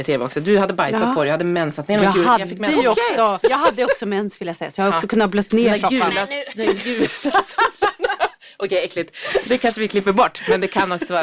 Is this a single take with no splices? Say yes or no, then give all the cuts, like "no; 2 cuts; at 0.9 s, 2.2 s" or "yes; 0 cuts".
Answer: no; 1 cut; at 3.4 s